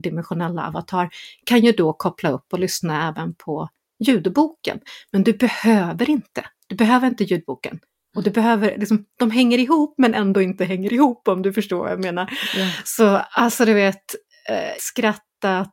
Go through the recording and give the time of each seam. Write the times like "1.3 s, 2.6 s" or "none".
14.8 s